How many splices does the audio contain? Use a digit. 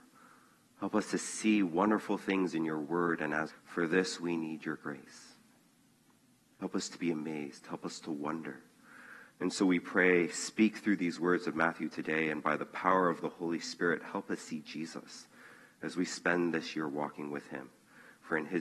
1